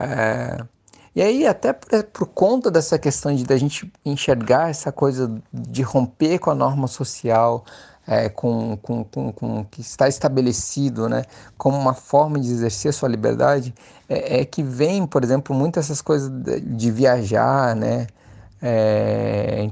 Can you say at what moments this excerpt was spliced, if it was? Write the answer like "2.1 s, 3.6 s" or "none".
16.6 s